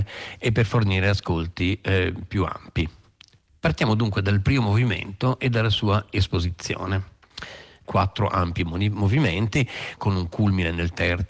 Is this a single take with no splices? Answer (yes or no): no